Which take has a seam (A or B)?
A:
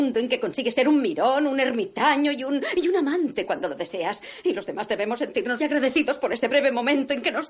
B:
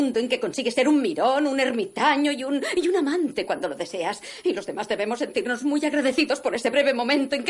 A